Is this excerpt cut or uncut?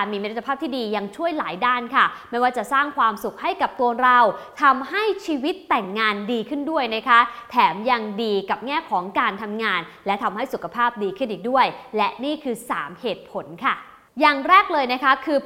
uncut